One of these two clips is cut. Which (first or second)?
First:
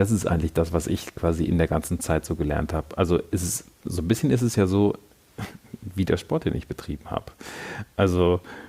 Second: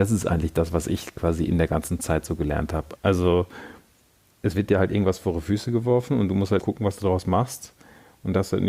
second